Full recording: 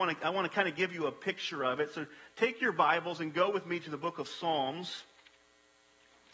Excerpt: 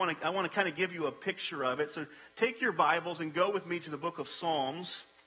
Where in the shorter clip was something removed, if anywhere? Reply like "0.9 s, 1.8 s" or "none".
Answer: none